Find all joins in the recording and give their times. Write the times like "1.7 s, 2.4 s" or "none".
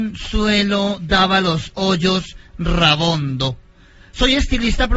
none